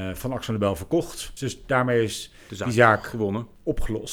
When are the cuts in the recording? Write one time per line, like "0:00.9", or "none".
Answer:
0:01.4